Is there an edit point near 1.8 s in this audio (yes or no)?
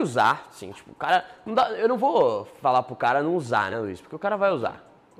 no